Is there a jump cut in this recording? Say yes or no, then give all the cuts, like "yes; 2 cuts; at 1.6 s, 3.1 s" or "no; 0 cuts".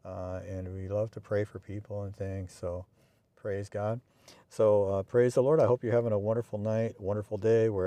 no; 0 cuts